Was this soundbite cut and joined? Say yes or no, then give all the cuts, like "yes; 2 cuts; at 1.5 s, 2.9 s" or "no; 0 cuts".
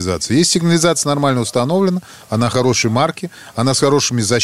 no; 0 cuts